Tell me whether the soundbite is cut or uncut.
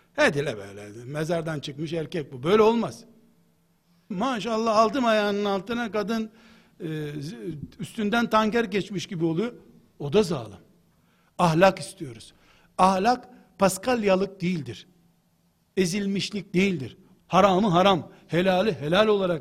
cut